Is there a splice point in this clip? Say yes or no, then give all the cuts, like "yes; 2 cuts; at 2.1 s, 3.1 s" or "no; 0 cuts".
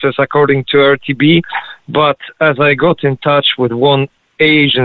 no; 0 cuts